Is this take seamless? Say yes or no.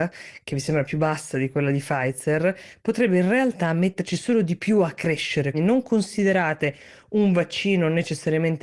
no